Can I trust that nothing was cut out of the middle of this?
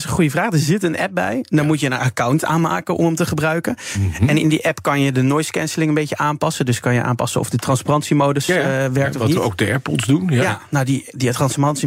yes; 0 cuts

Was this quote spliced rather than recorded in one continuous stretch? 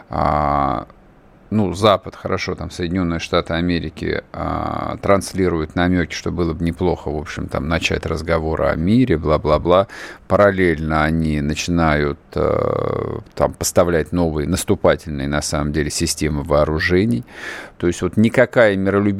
yes; 1 cut; at 17.8 s

